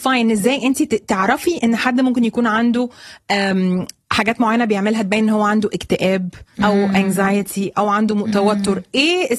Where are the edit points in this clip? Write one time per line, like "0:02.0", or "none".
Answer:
0:06.5